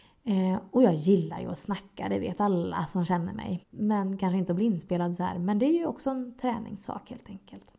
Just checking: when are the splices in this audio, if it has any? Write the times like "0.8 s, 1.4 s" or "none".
3.6 s